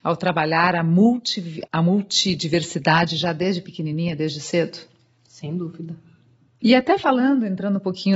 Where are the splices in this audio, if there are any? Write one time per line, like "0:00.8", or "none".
0:01.7
0:06.6